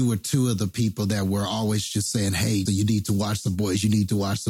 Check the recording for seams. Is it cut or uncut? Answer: cut